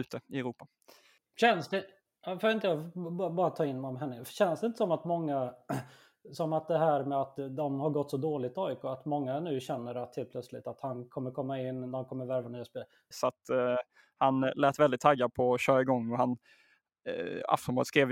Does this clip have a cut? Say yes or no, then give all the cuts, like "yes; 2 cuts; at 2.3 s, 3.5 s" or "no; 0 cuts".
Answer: yes; 1 cut; at 13.1 s